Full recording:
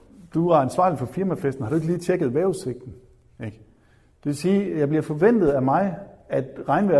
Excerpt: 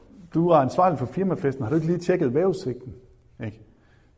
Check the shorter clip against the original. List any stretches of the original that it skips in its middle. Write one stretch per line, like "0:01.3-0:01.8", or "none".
none